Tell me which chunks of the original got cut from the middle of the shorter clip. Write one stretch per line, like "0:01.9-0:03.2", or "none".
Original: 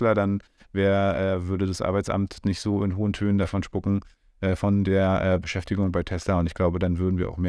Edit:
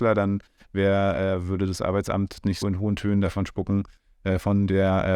0:02.6-0:02.8